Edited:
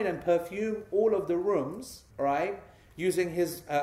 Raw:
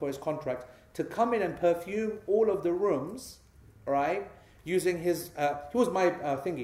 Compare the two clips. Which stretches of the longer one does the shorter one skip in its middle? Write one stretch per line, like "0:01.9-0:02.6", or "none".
0:03.5-0:03.8